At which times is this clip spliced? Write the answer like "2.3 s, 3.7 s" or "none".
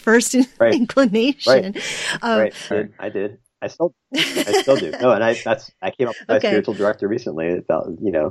2.7 s